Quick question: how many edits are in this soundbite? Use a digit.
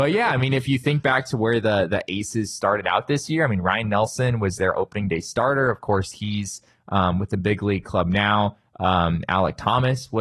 0